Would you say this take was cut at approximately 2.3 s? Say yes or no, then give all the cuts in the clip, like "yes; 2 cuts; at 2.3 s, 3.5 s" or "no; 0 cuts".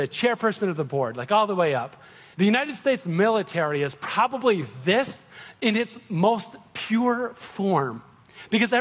yes; 1 cut; at 2.3 s